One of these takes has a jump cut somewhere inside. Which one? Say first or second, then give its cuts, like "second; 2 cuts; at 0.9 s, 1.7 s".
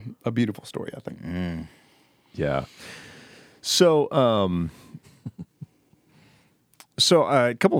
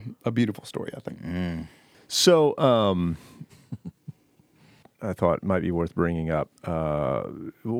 second; 2 cuts; at 1.9 s, 4.8 s